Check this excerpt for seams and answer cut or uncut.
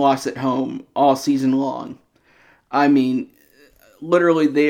uncut